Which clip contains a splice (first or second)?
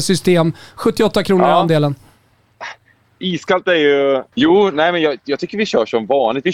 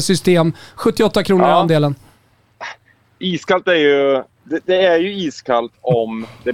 first